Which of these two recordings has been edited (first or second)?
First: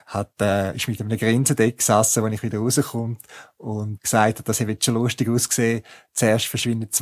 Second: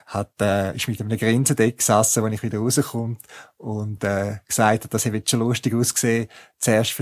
first